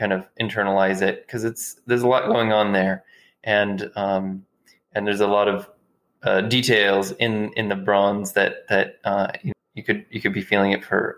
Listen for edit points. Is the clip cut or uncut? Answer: cut